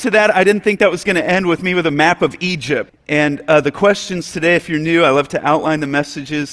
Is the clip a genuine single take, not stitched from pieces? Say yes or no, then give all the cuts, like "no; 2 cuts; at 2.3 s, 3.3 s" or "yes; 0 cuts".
no; 1 cut; at 2.9 s